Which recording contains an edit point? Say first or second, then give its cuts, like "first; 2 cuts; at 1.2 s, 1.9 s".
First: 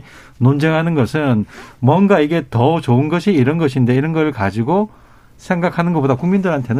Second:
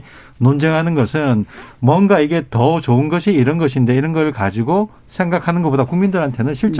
second; 1 cut; at 5.0 s